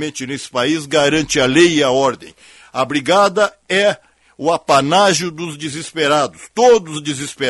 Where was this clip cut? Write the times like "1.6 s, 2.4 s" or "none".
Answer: none